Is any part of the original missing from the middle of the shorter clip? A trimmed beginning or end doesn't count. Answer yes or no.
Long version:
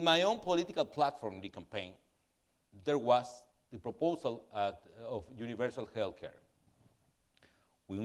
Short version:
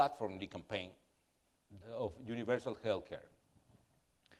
yes